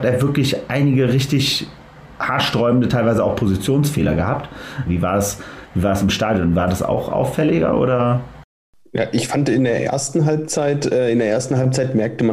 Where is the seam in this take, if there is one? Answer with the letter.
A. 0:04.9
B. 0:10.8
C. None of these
A